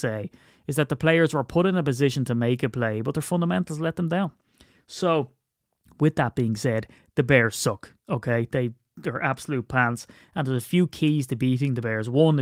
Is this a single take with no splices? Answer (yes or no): yes